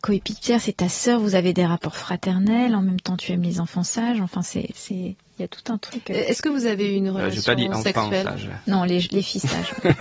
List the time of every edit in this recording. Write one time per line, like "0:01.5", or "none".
none

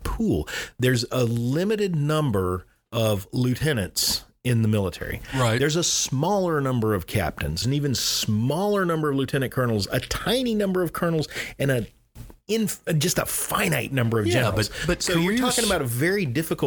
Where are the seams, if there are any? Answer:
0:07.6

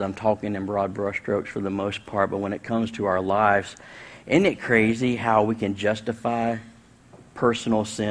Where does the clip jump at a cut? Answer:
none

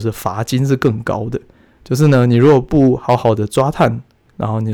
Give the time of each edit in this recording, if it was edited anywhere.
none

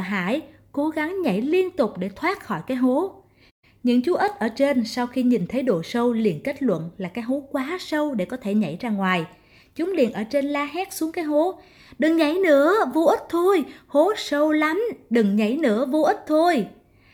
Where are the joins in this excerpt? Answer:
none

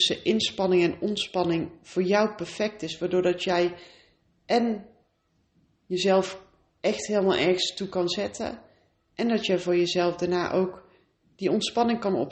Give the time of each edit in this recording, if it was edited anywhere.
none

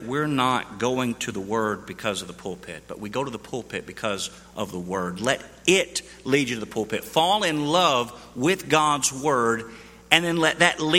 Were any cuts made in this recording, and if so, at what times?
none

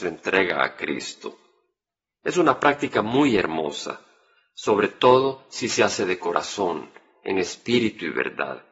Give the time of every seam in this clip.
none

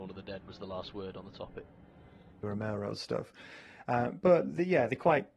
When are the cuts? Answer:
0:02.4

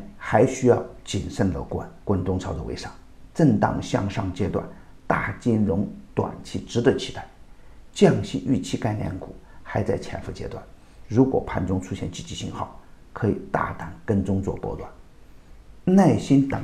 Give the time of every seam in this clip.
0:02.0

